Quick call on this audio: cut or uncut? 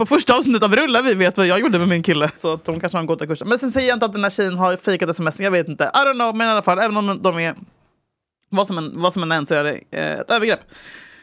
cut